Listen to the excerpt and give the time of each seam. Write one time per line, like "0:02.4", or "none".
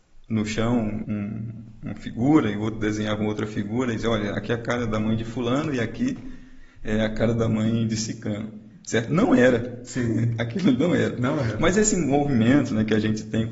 0:01.0